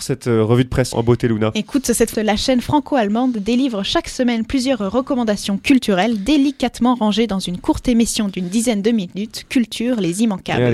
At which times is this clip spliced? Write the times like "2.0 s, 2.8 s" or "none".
0.9 s, 2.1 s